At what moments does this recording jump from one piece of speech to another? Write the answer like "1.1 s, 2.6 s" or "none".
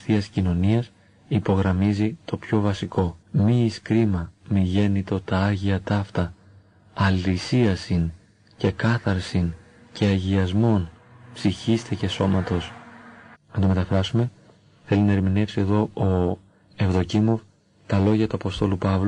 3.2 s, 13.3 s